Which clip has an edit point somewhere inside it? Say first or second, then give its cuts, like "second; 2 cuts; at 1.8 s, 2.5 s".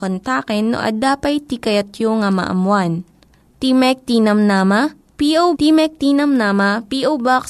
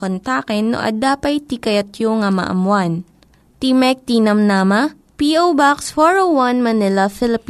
first; 1 cut; at 5.5 s